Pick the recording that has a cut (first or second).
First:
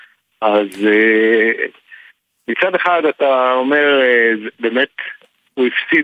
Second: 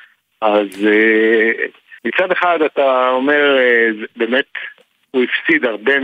second